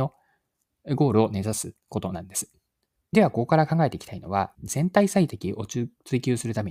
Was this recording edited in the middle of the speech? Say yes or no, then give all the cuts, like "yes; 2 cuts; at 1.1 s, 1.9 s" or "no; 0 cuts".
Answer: yes; 2 cuts; at 3.0 s, 4.5 s